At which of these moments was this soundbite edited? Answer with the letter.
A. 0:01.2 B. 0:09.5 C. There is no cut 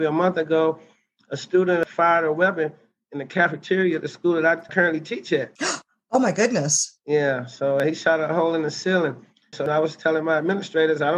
B